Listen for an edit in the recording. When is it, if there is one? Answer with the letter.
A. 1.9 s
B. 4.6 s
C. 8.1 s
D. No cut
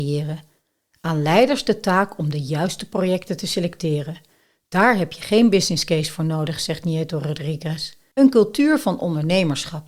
C